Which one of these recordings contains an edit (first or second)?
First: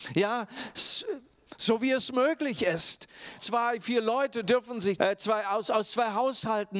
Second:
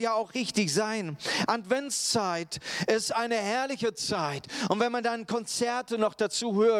first